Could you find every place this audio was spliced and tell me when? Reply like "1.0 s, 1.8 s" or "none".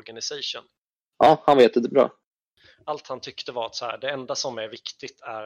none